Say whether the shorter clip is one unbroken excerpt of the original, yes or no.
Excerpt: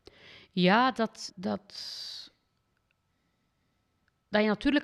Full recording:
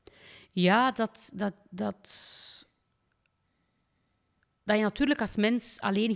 no